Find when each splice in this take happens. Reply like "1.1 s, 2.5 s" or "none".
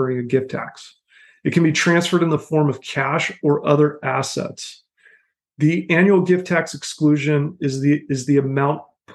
none